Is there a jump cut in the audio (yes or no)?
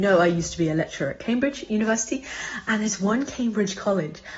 no